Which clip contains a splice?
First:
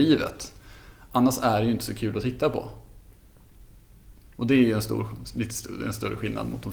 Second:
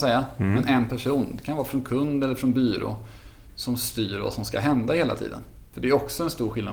second; 1 cut; at 5.7 s

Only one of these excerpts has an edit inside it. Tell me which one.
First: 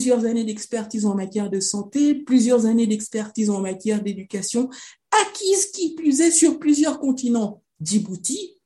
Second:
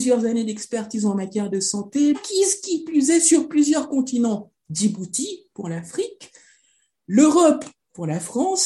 second; 1 cut; at 2.1 s

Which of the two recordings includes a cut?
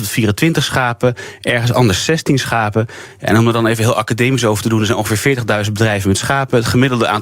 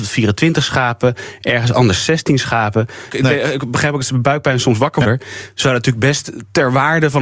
second; 2 cuts; at 3.1 s, 5.0 s

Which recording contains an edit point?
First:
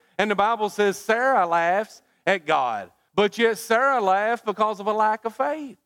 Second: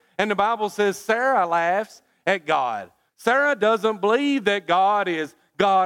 second; 1 cut; at 3.1 s

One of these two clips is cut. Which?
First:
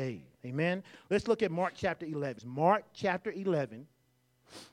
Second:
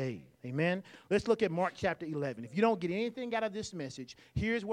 first; 1 cut; at 2.4 s

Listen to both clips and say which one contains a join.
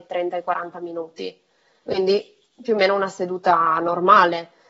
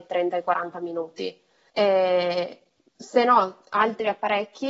second; 1 cut; at 1.7 s

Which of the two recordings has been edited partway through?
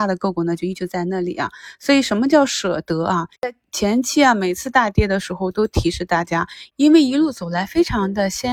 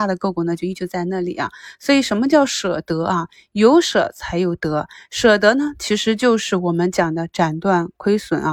first; 2 cuts; at 3.3 s, 6.7 s

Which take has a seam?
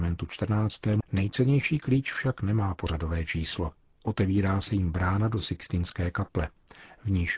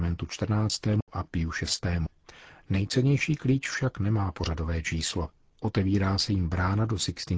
first; 1 cut; at 1.0 s

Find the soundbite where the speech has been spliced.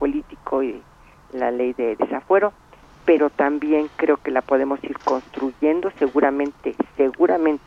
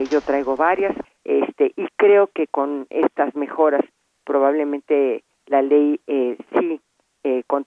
second; 1 cut; at 1.0 s

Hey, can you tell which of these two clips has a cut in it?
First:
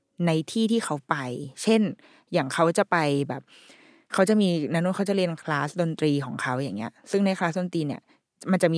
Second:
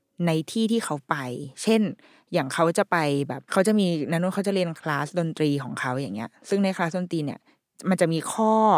second; 1 cut; at 3.4 s

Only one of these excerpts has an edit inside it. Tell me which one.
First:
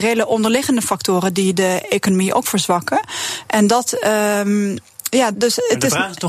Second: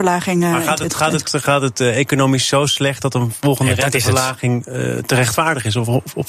first; 1 cut; at 5.3 s

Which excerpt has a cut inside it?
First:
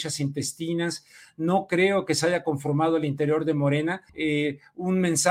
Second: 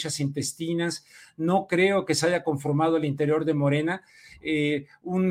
first; 1 cut; at 4.1 s

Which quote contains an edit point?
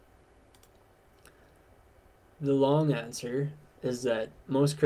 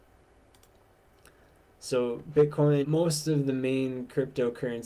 second; 2 cuts; at 1.6 s, 2.8 s

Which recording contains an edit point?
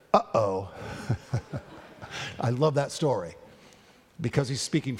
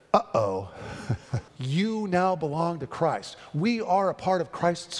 second; 1 cut; at 1.5 s

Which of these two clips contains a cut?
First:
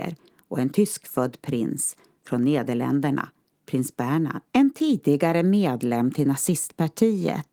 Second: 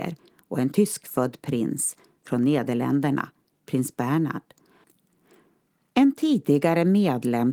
first; 1 cut; at 4.5 s

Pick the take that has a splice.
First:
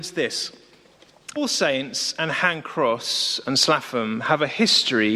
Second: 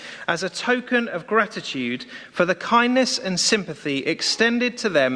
first; 1 cut; at 1.4 s

